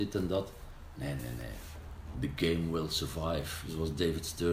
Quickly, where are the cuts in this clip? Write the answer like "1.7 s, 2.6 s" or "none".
1.2 s